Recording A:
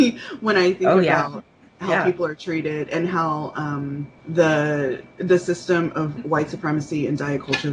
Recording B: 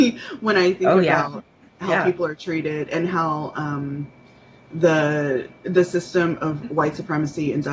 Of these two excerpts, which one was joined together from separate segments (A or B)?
A